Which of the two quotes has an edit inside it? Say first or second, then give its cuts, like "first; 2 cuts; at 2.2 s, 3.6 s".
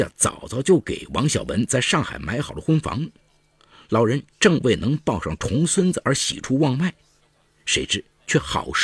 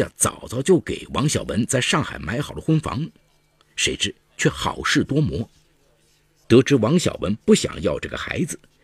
second; 2 cuts; at 3.6 s, 6.4 s